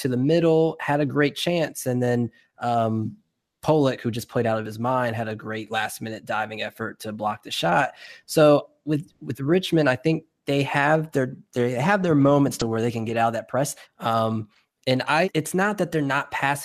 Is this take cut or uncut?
cut